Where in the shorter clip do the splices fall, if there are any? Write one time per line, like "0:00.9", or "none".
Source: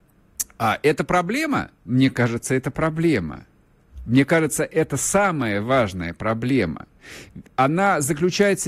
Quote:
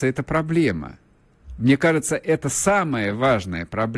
none

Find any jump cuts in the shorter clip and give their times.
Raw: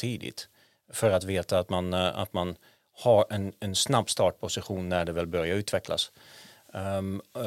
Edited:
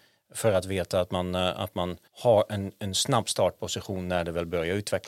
0:02.1

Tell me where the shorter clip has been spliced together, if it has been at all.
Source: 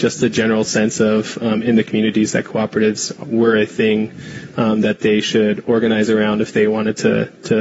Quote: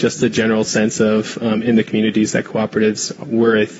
none

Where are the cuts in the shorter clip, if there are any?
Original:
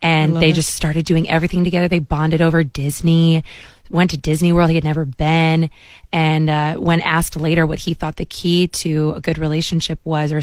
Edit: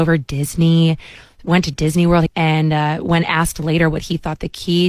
0:02.3

